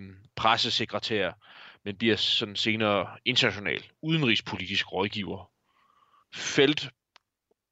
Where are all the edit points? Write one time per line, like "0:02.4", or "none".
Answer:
0:06.2